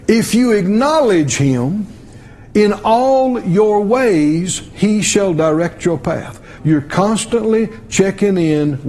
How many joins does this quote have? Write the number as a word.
one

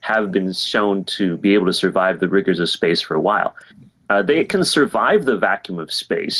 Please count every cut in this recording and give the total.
one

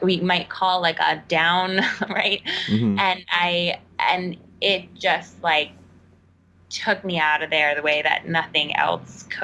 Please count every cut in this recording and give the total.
one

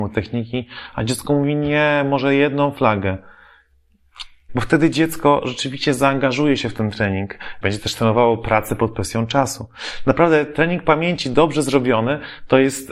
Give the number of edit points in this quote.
two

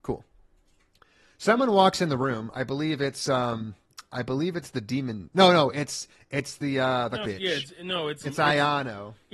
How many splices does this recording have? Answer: two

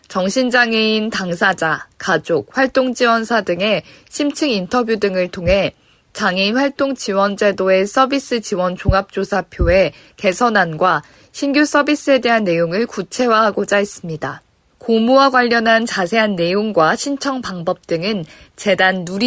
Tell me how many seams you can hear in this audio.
one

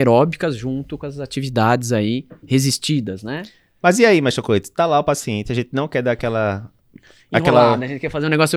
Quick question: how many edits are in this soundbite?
zero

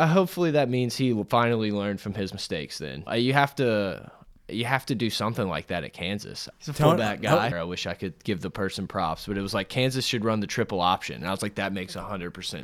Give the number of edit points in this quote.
three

